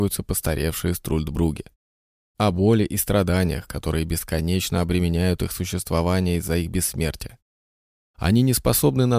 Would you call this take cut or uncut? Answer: uncut